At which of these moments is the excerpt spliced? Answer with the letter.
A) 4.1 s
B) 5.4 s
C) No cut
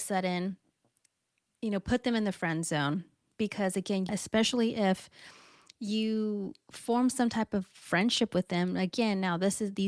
A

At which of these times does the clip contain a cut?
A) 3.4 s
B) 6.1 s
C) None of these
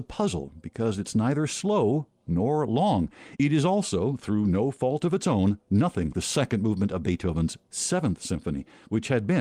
B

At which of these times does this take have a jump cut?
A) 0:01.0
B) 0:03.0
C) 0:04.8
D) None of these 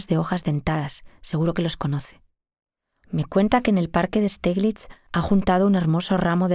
B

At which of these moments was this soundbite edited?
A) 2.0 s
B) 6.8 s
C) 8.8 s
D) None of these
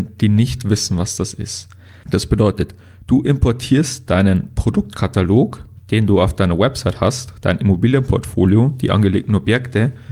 A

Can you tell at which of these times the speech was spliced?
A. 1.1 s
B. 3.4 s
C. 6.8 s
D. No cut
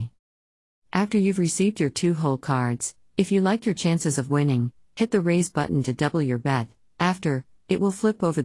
D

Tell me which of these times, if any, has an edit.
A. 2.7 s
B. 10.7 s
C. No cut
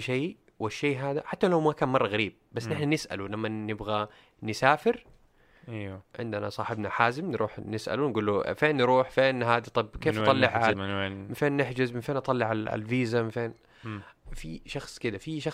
B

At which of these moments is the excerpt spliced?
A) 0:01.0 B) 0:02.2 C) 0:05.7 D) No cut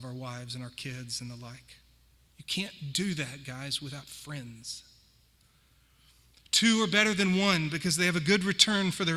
B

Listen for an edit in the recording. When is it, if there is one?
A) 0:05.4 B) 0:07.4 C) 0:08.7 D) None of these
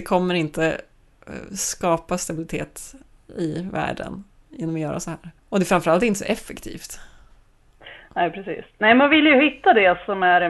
A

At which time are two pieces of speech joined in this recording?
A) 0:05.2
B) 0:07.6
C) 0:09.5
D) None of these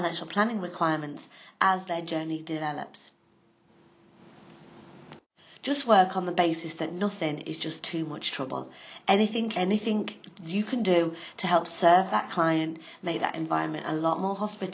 C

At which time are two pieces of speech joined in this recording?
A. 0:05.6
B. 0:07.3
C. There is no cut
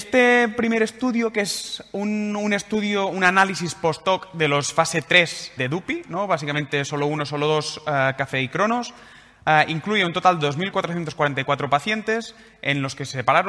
A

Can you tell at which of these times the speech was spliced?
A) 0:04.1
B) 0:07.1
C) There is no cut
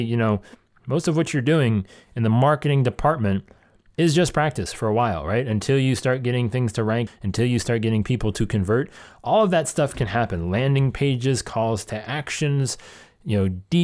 B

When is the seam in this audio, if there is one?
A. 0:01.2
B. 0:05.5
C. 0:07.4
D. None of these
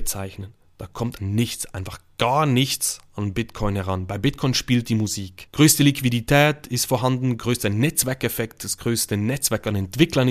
A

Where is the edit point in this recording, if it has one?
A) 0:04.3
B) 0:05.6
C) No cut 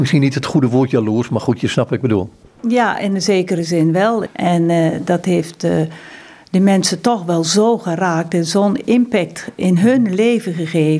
A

